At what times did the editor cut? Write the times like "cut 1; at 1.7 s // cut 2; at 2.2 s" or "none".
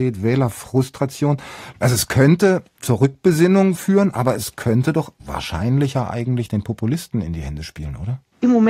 none